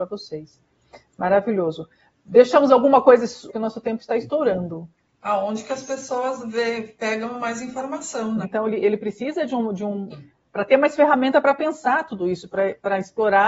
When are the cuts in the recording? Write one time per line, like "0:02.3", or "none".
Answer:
0:03.5
0:08.4
0:10.1